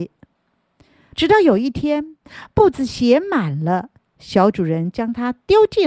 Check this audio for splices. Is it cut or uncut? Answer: cut